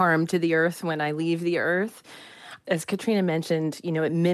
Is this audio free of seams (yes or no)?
yes